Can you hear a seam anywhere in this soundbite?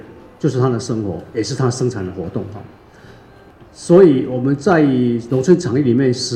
no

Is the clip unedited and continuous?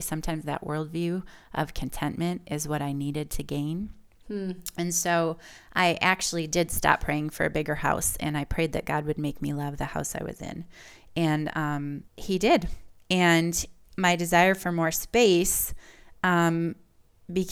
no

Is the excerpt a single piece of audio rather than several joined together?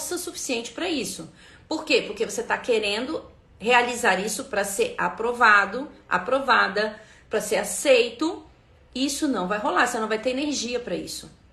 yes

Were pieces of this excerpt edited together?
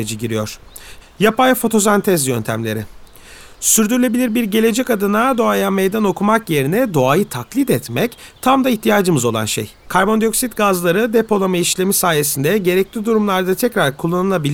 yes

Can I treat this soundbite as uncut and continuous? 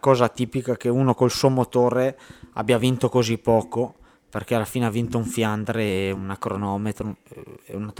yes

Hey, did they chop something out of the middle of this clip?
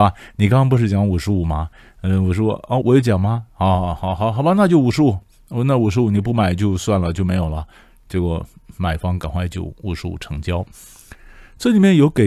yes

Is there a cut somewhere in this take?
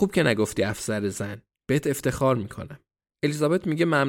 no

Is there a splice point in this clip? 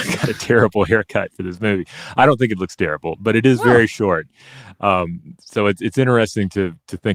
no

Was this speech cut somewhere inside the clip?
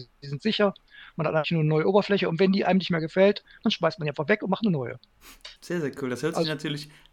yes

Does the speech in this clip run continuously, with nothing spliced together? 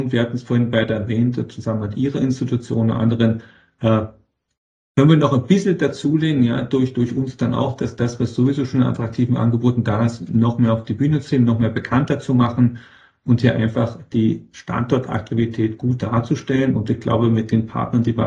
yes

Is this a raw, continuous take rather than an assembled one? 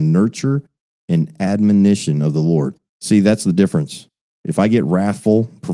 no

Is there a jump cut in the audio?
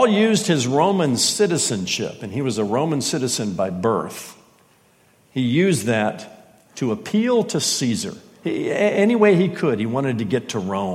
no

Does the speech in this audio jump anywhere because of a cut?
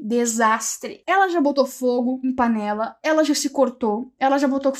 no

